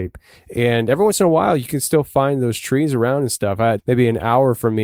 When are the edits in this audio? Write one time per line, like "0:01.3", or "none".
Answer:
0:03.8